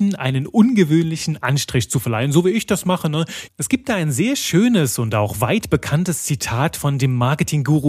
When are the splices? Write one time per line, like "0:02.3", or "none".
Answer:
0:03.5